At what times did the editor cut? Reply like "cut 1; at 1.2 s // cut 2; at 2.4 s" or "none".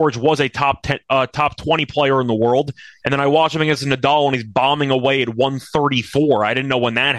cut 1; at 3.0 s

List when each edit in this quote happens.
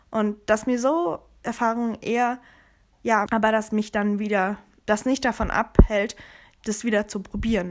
cut 1; at 3.3 s // cut 2; at 4.8 s

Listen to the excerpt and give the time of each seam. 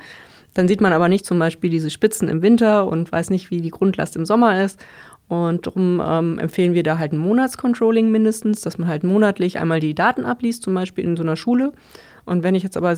none

